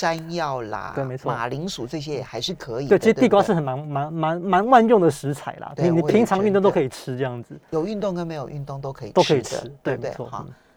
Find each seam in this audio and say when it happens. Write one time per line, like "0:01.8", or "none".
0:00.9